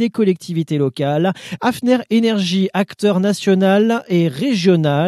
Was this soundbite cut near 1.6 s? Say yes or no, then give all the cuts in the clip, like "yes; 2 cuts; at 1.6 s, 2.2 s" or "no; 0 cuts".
yes; 1 cut; at 1.6 s